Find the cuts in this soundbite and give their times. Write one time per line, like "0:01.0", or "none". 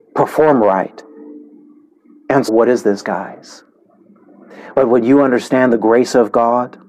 0:02.5
0:04.7